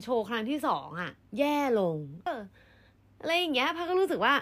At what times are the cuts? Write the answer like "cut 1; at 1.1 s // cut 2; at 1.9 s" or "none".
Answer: cut 1; at 2.3 s